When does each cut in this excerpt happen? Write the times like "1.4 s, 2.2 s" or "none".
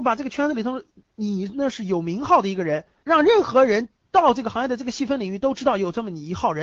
3.0 s